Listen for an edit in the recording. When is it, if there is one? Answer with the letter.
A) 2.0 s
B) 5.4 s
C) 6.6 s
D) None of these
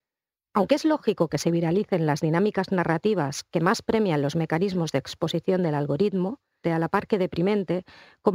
C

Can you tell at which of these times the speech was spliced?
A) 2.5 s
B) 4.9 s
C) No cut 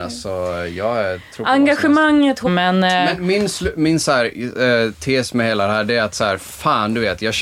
A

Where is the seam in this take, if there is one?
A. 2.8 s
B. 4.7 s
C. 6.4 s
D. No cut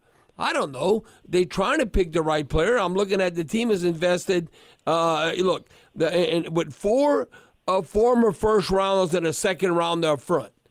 D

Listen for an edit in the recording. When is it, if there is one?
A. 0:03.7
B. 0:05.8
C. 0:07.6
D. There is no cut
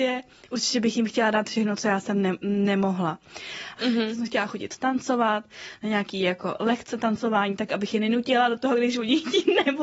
A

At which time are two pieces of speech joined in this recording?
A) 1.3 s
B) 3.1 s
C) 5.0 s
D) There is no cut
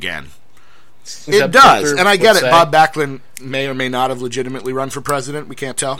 A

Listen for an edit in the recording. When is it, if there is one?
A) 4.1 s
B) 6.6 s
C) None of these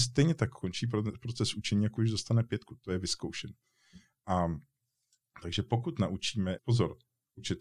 B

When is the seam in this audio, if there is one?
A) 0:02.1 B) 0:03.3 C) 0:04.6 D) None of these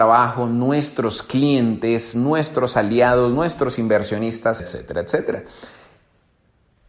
C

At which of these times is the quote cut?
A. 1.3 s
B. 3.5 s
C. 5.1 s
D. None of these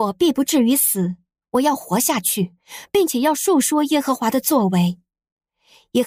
D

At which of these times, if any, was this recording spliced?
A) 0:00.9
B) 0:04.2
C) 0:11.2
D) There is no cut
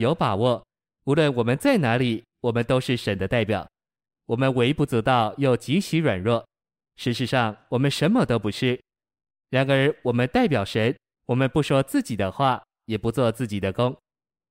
C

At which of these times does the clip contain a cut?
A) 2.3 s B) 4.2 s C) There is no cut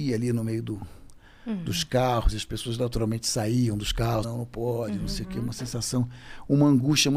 B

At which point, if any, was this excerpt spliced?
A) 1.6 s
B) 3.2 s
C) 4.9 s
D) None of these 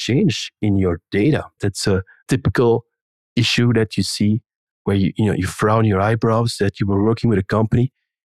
A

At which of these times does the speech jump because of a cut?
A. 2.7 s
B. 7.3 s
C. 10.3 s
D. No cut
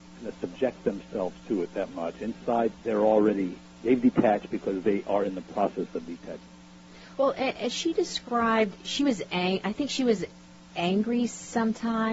A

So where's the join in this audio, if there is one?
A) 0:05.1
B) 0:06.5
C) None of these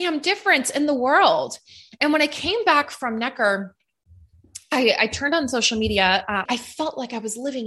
B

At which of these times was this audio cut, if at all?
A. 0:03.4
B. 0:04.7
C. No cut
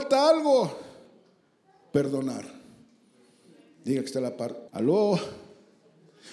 B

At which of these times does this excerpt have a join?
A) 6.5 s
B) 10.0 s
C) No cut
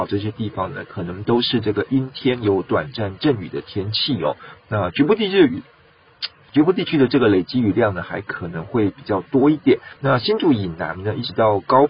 B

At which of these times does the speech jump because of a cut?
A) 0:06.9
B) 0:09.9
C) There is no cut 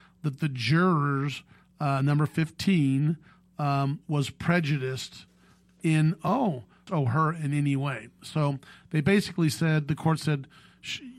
A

